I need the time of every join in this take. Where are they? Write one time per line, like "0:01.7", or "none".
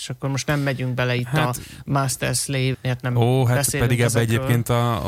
0:02.7

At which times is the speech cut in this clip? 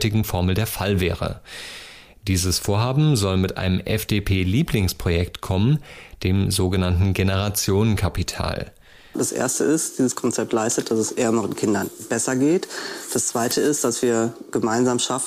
0:09.1

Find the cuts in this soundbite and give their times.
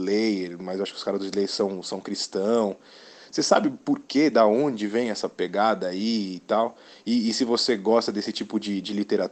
none

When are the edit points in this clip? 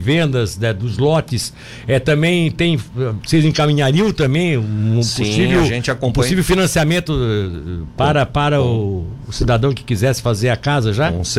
0:03.2

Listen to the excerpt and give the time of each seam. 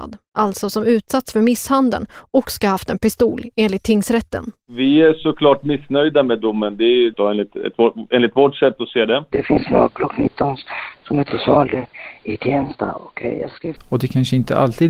0:07.1
0:09.3
0:13.8

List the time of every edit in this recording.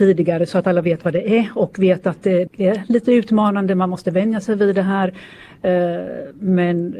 0:02.5

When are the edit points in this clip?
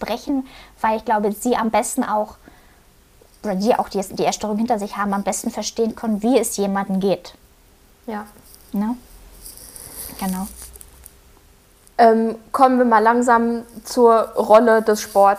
none

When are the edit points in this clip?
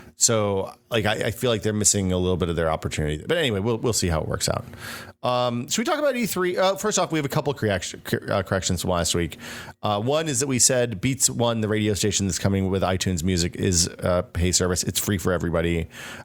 none

